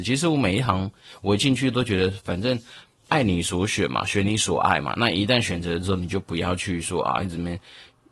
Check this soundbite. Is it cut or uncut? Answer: uncut